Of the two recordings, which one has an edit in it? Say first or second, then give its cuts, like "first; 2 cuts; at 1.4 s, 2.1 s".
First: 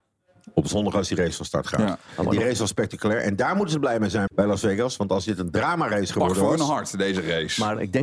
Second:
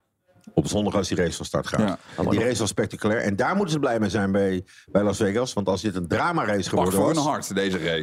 first; 1 cut; at 4.3 s